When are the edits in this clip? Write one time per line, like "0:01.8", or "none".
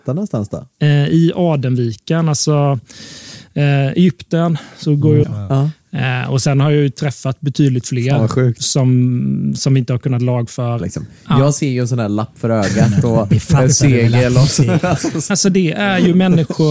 0:05.2
0:10.8
0:15.3